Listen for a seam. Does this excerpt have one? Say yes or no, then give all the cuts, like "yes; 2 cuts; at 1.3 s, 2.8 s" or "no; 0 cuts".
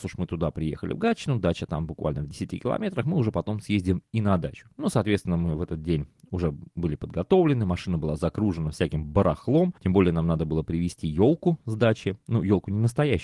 yes; 1 cut; at 9.8 s